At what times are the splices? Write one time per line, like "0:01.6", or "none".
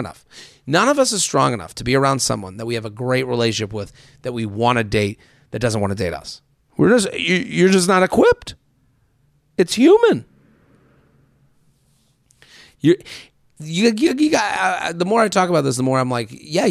none